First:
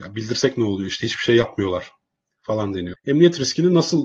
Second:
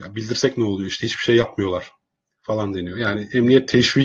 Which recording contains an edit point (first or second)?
first